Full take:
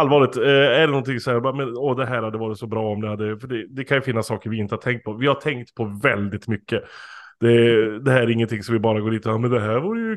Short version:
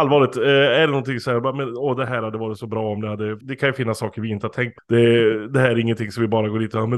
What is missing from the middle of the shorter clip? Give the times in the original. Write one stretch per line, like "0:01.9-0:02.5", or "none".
0:03.4-0:03.7
0:05.1-0:07.3